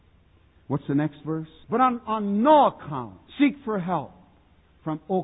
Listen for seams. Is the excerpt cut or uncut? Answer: cut